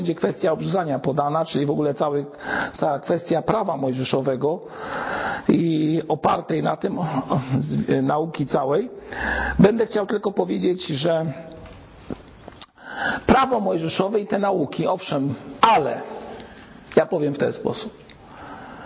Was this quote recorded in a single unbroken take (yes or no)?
no